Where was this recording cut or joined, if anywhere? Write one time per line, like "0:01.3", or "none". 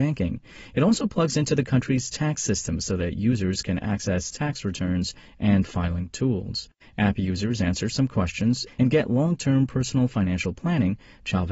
0:06.8
0:08.7

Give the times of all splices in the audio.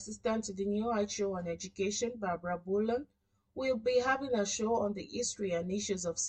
none

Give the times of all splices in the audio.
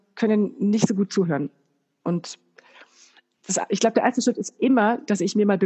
none

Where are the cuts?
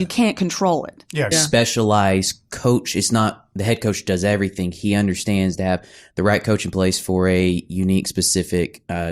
0:01.3

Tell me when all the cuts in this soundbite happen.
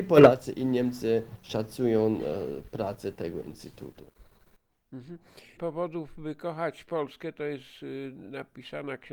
0:05.6

